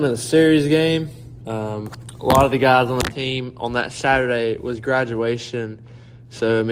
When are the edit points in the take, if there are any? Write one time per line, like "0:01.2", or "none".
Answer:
0:01.4